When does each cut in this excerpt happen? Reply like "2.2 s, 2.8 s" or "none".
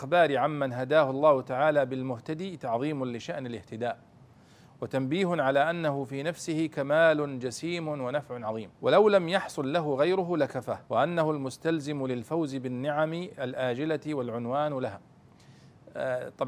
8.7 s, 10.9 s

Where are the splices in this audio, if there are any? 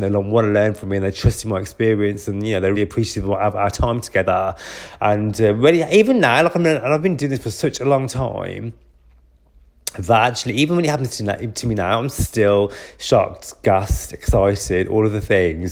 2.7 s, 5.0 s

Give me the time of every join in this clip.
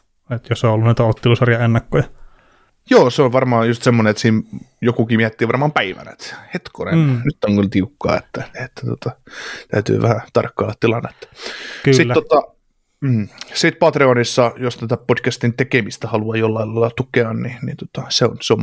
none

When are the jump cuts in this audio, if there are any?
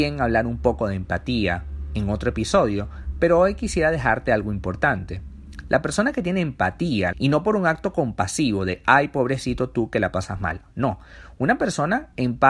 7.1 s

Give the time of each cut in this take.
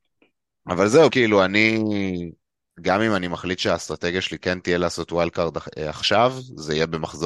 1.1 s, 2.7 s

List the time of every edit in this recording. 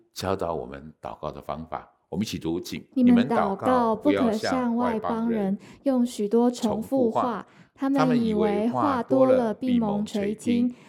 2.9 s

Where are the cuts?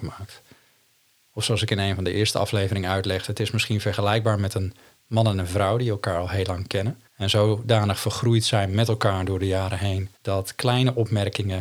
7.1 s, 10.2 s

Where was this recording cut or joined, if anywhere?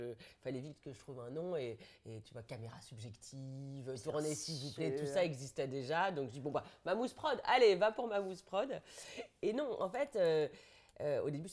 none

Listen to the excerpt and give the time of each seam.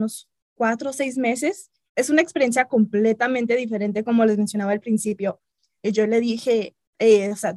1.9 s, 5.8 s

